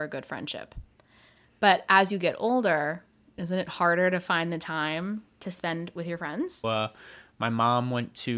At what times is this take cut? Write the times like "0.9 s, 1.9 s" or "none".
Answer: 6.6 s